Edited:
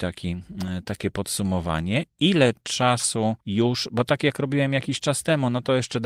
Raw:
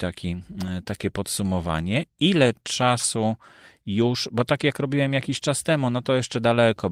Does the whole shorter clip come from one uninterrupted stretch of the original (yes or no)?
no